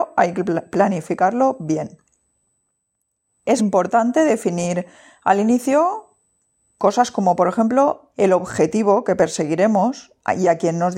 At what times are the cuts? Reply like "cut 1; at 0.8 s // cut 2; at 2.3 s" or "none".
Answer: cut 1; at 3.6 s // cut 2; at 8.1 s